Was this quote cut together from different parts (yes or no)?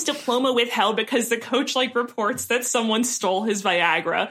no